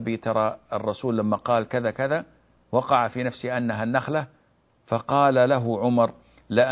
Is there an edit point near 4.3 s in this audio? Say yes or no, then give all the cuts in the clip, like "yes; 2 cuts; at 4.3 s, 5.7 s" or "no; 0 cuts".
no; 1 cut; at 1.9 s